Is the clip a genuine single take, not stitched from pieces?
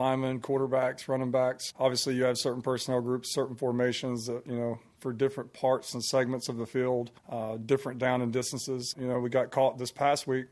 no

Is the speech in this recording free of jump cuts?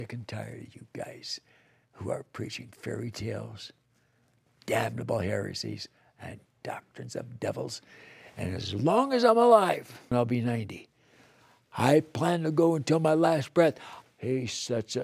no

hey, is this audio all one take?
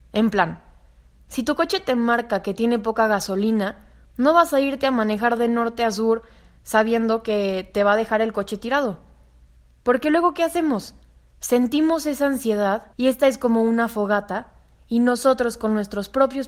no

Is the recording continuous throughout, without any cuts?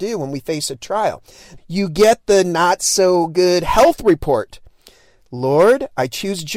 no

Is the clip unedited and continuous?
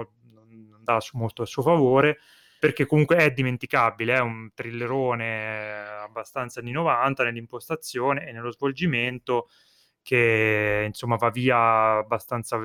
no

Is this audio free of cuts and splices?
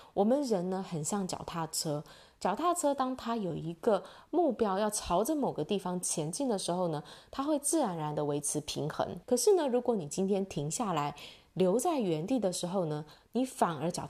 no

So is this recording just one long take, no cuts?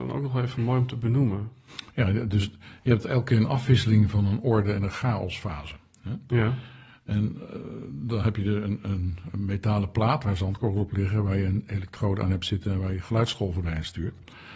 yes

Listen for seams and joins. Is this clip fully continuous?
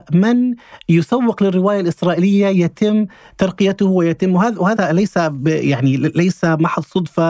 no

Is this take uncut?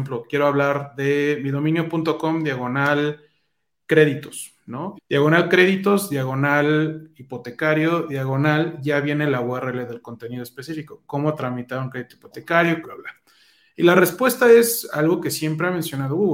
no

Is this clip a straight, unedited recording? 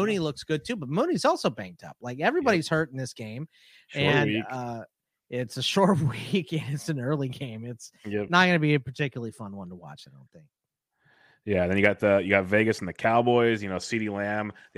yes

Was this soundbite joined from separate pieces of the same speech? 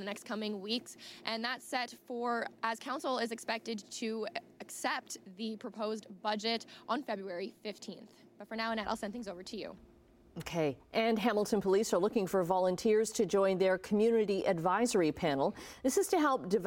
no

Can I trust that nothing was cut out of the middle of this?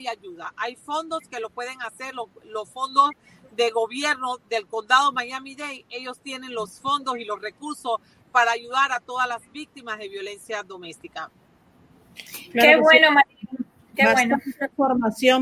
yes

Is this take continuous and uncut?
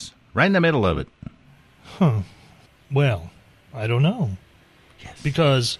yes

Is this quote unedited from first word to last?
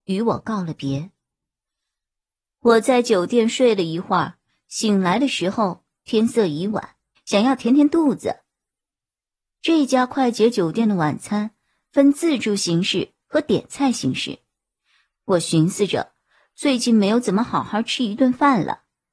no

